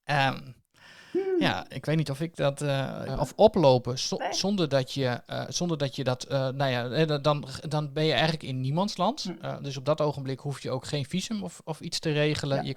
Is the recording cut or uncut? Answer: cut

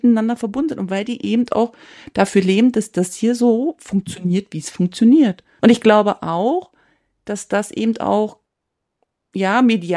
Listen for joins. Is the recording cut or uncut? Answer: cut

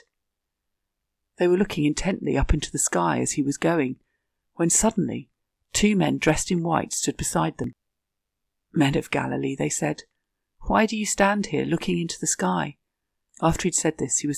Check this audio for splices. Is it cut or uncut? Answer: cut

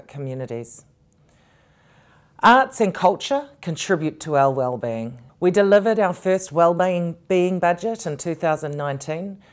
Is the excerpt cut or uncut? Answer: cut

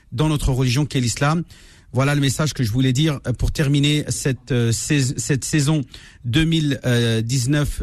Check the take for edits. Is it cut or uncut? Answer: uncut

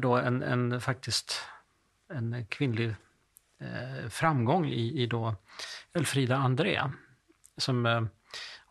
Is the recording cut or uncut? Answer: uncut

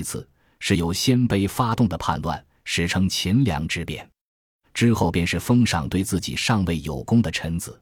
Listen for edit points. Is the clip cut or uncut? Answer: cut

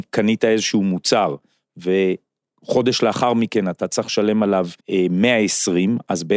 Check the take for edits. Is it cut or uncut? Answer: cut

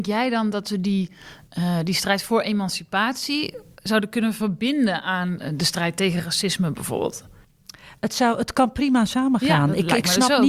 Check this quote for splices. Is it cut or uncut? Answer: uncut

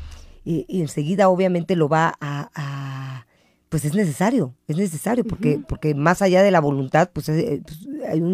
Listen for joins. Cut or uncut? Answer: uncut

